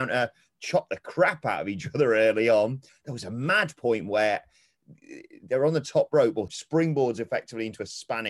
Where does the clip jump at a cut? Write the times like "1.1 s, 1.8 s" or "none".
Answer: 2.9 s, 6.5 s